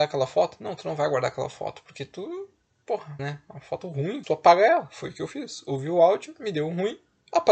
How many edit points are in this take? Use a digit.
2